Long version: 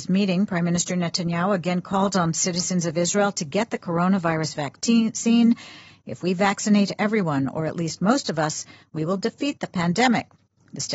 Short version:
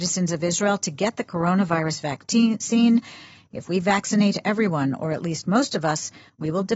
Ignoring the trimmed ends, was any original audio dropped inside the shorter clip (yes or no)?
no